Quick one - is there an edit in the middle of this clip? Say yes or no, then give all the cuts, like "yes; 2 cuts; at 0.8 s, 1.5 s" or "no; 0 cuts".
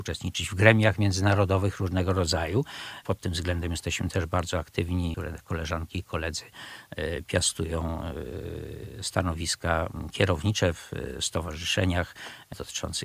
no; 0 cuts